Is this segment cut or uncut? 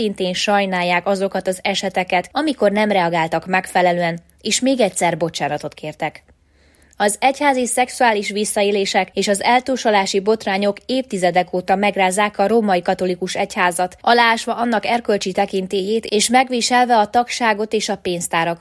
uncut